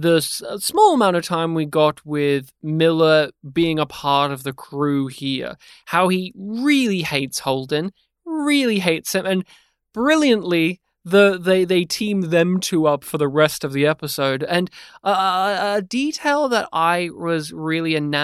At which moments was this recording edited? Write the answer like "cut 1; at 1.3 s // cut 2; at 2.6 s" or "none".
none